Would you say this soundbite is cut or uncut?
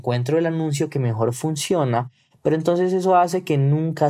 uncut